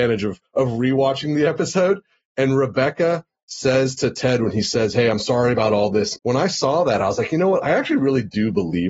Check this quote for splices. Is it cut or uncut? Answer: cut